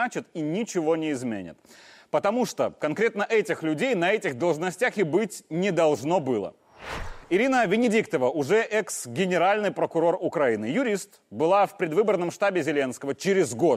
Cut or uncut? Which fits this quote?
uncut